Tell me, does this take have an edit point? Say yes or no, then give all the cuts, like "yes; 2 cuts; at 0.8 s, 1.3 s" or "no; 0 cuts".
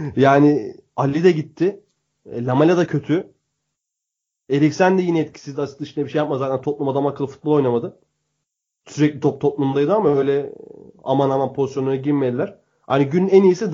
no; 0 cuts